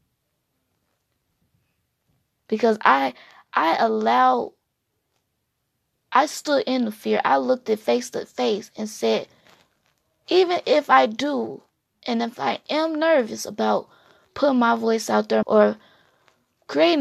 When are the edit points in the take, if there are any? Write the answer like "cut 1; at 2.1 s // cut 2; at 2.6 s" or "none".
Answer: cut 1; at 15.4 s